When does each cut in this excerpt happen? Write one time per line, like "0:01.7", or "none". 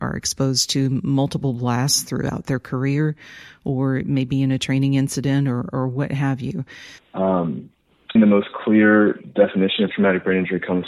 0:07.0
0:08.2